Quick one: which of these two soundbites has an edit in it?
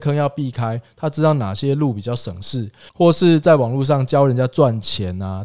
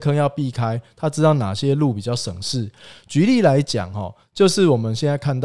first; 1 cut; at 2.9 s

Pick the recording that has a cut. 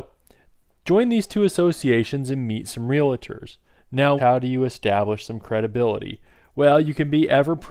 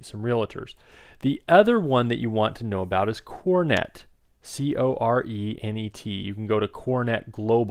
first; 1 cut; at 4.2 s

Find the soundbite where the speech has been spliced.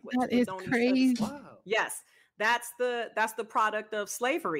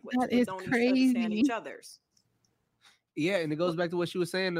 first; 1 cut; at 1.1 s

